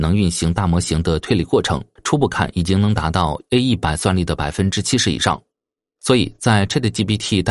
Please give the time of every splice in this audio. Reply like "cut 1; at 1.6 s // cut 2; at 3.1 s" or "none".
cut 1; at 2.0 s